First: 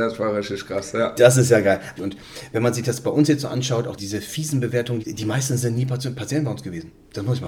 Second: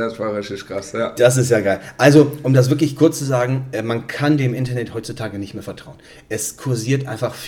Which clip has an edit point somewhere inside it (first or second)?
first